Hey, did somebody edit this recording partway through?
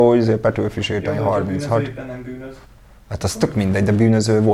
no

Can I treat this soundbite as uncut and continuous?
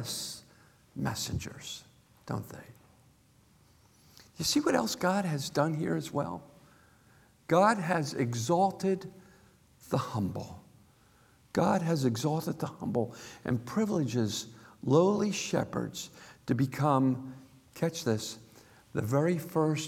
yes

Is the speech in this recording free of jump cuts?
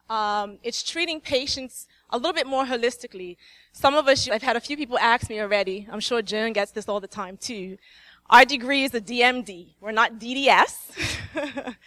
no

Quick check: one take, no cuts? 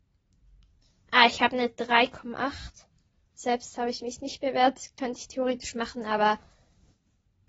yes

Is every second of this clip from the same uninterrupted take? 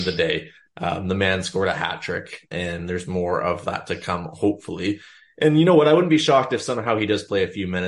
no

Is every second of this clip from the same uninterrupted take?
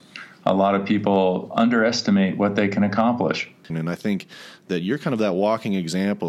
no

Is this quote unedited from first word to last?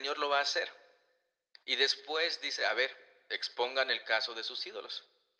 yes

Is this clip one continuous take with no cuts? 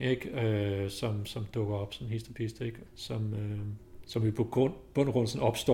yes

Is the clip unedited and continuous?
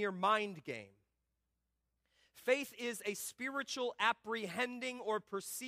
yes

